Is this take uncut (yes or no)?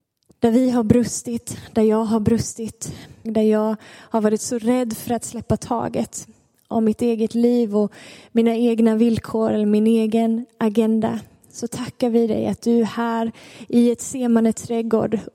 no